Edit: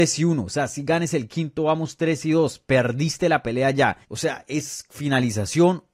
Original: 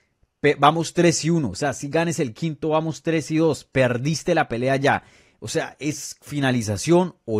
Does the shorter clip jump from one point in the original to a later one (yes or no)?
yes